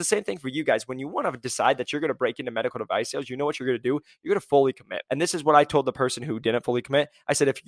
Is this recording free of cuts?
no; 1 cut; at 5.0 s

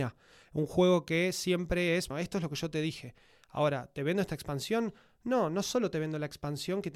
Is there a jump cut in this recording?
yes; 1 cut; at 2.1 s

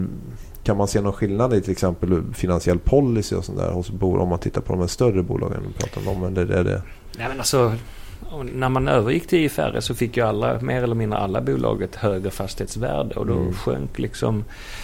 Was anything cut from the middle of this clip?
no; 0 cuts

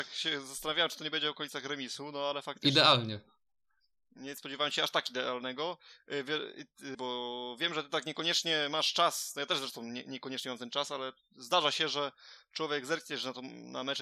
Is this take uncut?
no; 1 cut; at 6.9 s

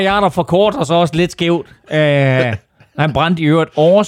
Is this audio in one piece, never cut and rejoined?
yes; 0 cuts

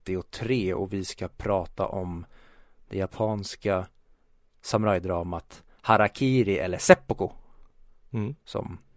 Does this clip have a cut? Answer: no; 0 cuts

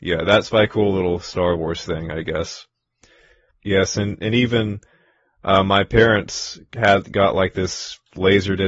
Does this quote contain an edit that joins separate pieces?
yes; 1 cut; at 3.5 s

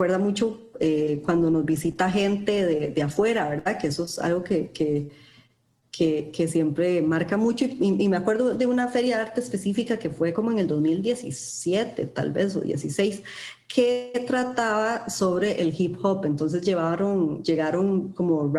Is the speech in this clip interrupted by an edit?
no; 0 cuts

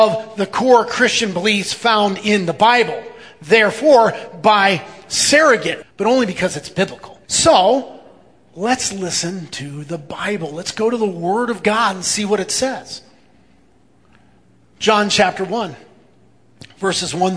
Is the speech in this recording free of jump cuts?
no; 2 cuts; at 5.8 s, 7.2 s

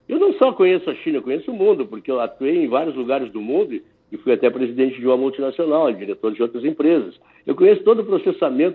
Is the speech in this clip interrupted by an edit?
no; 0 cuts

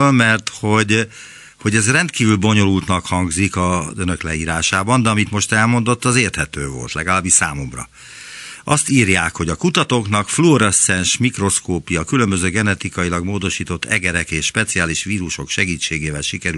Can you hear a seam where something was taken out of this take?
no; 0 cuts

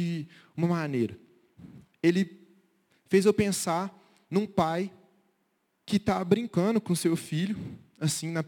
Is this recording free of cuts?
yes; 0 cuts

